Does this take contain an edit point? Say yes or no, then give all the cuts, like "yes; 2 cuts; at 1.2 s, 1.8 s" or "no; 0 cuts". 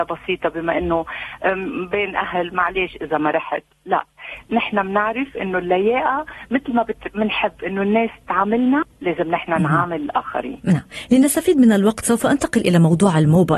yes; 1 cut; at 3.7 s